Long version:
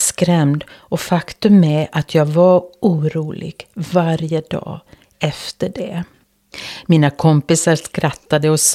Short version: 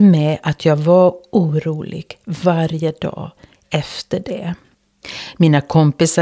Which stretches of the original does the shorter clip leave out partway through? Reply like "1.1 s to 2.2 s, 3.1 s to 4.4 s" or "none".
none